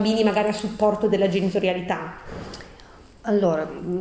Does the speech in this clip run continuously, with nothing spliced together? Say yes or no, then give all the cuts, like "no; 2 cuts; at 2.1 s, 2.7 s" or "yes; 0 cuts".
yes; 0 cuts